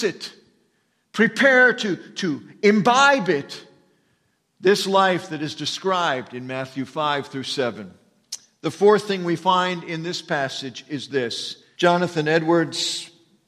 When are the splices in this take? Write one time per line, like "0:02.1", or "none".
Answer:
0:11.8